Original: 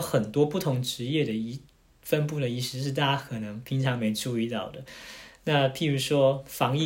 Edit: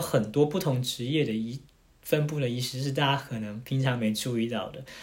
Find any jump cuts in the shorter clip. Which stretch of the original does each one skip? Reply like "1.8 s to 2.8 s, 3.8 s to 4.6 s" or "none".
none